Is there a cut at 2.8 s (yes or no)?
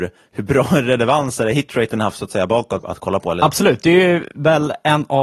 yes